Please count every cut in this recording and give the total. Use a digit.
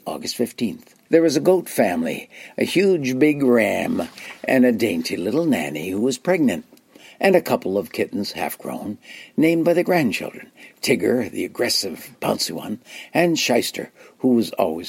1